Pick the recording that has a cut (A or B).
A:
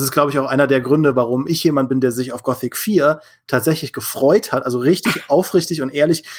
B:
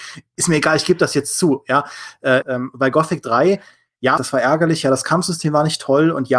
B